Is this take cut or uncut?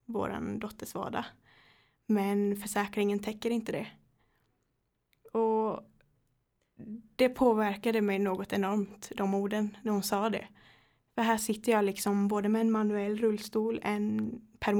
uncut